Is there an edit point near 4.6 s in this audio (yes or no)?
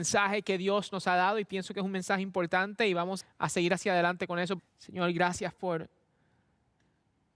yes